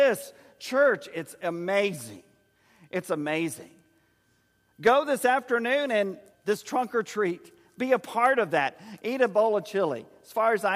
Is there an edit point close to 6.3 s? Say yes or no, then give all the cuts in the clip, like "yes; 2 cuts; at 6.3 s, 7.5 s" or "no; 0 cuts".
yes; 2 cuts; at 6.3 s, 9.0 s